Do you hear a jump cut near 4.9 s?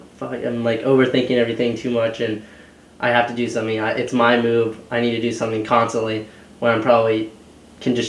no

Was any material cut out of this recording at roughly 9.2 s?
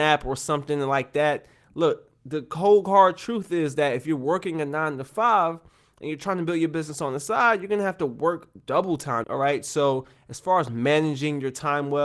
yes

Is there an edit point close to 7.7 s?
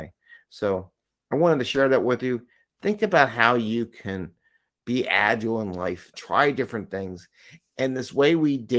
no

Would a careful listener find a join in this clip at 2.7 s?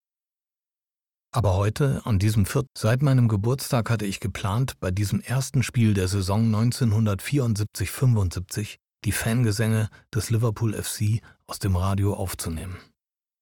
yes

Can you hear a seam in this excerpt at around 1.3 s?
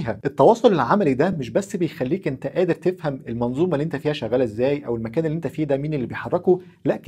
no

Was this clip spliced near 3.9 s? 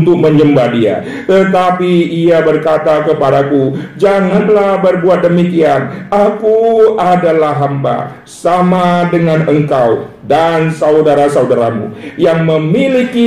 no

